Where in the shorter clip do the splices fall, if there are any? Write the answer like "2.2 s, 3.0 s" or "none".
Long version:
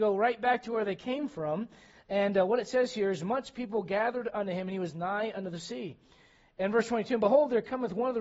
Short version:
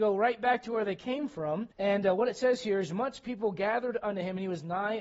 1.7 s